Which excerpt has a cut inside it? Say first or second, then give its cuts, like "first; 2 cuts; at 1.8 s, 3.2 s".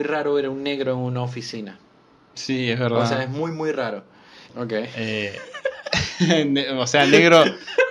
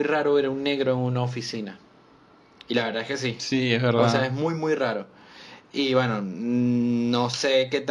first; 2 cuts; at 2.3 s, 4.4 s